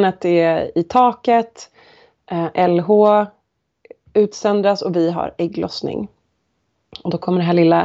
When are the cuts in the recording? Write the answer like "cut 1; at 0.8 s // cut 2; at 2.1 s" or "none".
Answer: none